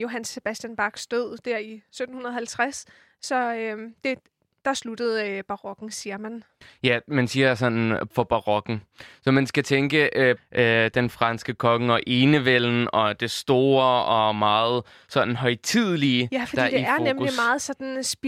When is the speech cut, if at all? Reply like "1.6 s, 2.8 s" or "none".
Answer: 8.1 s, 10.4 s